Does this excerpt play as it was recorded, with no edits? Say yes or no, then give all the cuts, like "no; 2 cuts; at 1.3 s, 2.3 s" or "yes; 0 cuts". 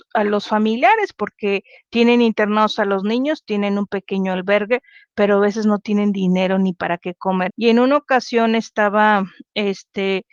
no; 1 cut; at 7.5 s